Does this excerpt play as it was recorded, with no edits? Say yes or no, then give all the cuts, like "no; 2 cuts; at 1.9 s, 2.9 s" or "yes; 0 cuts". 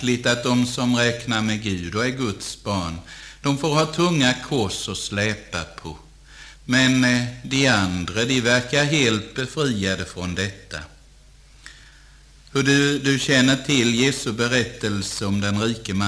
no; 1 cut; at 6.5 s